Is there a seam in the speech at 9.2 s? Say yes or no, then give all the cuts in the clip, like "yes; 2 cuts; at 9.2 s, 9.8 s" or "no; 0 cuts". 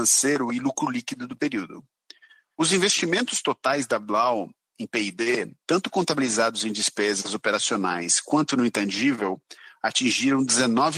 no; 1 cut; at 2.5 s